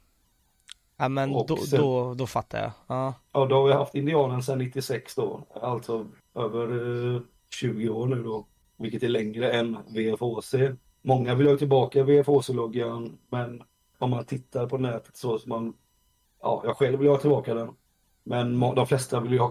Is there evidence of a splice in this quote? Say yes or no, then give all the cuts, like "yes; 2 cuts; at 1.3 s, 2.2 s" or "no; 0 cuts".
no; 0 cuts